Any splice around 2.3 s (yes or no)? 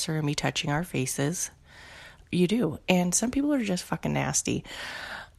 yes